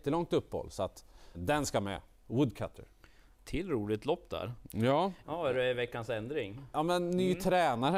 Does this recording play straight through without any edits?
no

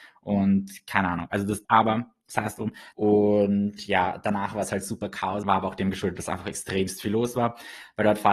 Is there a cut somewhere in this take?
yes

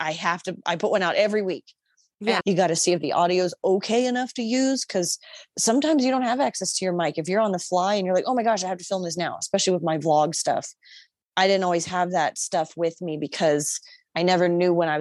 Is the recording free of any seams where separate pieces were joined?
no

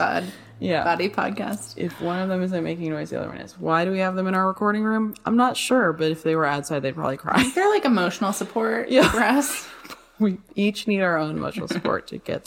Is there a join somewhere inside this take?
no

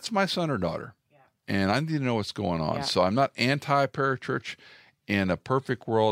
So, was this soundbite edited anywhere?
no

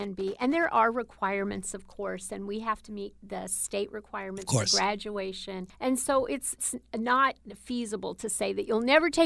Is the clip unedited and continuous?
yes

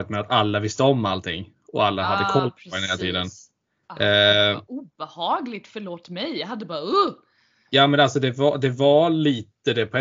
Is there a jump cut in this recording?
no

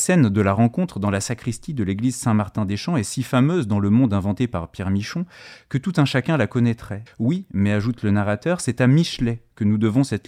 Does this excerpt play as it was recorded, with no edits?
no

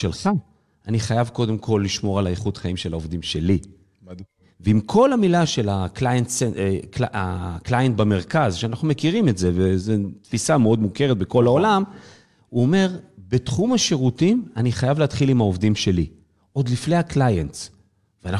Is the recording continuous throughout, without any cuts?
yes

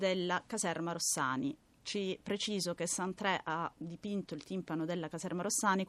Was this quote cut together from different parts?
no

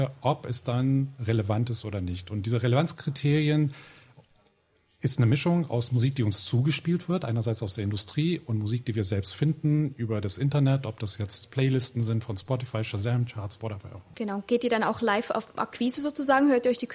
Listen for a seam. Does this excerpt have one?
yes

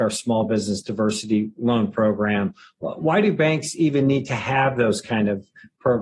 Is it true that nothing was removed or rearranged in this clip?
yes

